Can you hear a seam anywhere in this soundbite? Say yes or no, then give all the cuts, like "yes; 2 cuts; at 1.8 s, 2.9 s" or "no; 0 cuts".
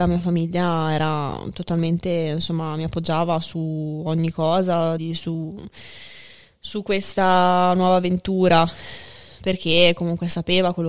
yes; 1 cut; at 5.0 s